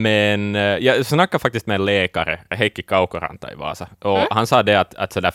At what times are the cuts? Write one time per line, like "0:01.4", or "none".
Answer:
none